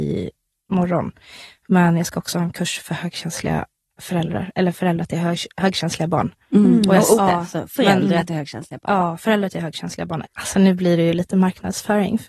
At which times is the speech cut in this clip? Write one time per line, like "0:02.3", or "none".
0:07.1
0:10.2